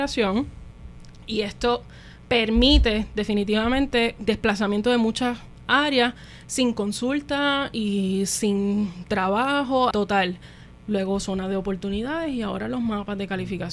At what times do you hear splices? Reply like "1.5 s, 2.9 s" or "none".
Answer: 4.2 s, 9.9 s